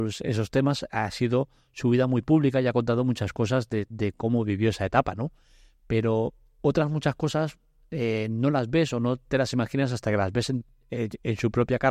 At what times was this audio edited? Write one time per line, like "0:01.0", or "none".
none